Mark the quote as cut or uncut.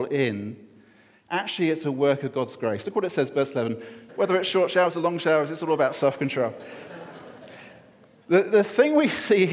cut